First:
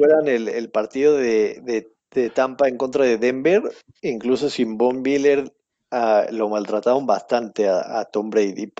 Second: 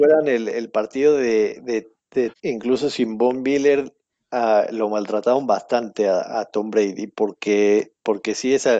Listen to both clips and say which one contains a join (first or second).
second